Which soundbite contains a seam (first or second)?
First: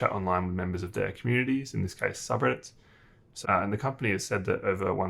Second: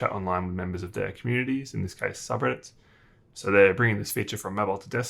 first